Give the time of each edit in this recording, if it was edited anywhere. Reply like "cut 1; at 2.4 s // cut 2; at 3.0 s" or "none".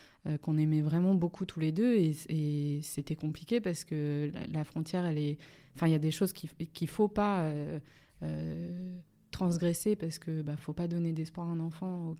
none

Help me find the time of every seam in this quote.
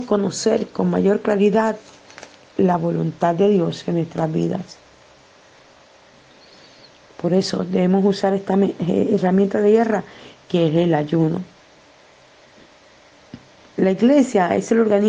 none

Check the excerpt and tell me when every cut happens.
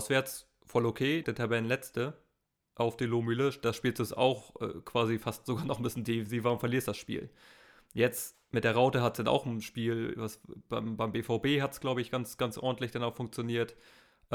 cut 1; at 1.2 s

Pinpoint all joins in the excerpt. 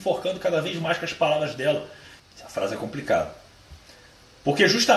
cut 1; at 2.2 s

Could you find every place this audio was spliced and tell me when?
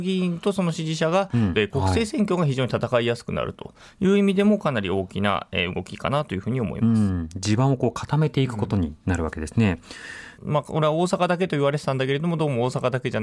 cut 1; at 1.5 s // cut 2; at 10.4 s

